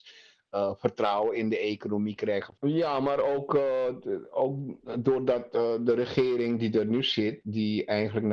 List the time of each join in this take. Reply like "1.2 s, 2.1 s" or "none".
2.6 s